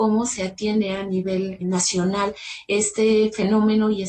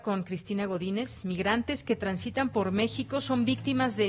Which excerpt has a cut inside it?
first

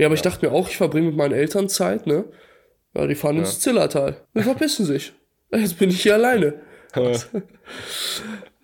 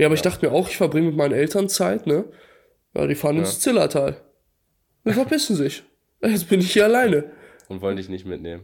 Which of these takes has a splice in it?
first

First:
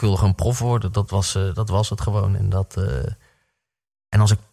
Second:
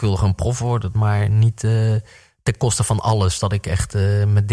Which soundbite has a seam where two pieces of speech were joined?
second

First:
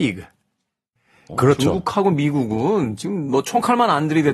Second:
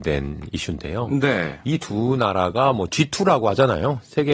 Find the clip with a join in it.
first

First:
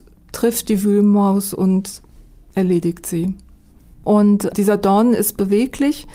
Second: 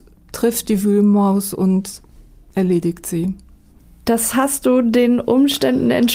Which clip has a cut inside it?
first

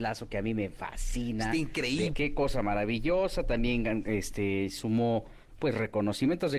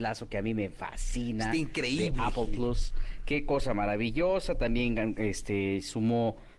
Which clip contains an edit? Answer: first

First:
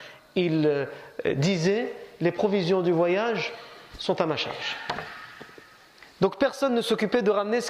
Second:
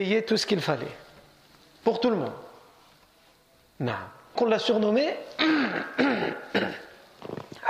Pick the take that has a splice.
second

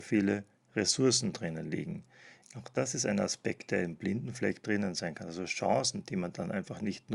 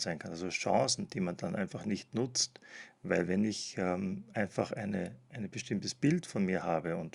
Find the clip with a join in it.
first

